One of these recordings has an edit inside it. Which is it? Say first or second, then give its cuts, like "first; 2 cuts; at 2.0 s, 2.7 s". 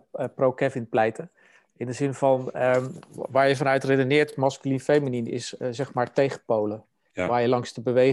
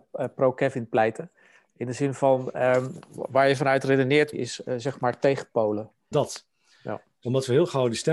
second; 2 cuts; at 4.3 s, 6.1 s